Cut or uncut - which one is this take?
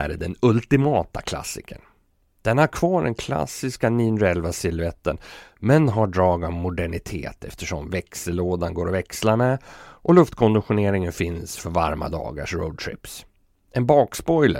uncut